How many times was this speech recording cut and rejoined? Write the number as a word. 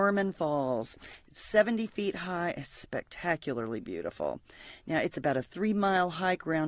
zero